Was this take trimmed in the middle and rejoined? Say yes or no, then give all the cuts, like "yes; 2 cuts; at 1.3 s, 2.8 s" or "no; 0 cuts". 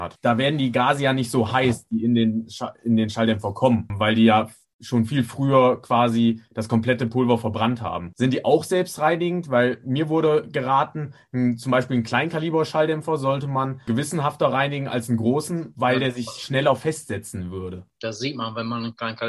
yes; 1 cut; at 18.0 s